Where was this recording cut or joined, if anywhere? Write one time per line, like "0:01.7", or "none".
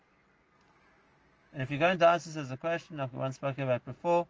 none